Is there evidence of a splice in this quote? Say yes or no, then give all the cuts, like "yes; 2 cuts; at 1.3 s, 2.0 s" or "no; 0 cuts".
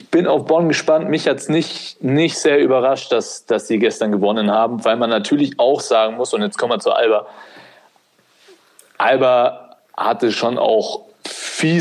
no; 0 cuts